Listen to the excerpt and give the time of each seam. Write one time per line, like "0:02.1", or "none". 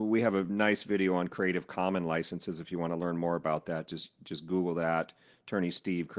none